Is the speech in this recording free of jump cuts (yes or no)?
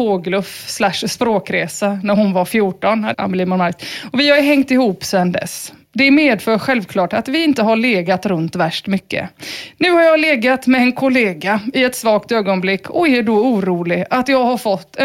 no